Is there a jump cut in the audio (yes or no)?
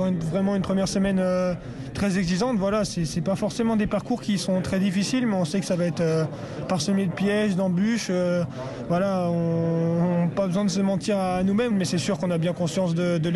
yes